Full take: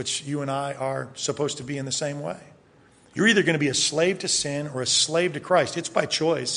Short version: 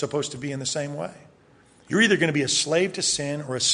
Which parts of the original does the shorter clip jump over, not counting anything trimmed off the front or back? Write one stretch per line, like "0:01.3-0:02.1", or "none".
none